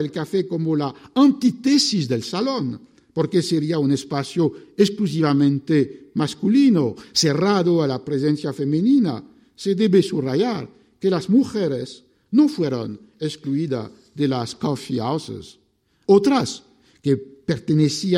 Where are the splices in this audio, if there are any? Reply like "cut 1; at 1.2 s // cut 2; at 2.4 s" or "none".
cut 1; at 16.0 s